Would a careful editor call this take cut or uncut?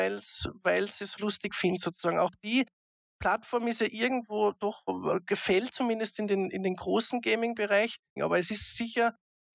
cut